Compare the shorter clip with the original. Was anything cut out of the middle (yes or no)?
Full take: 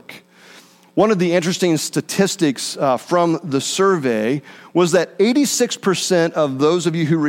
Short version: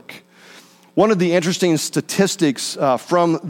no